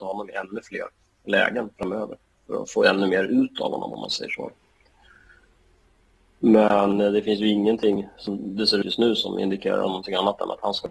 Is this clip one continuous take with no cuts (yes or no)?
yes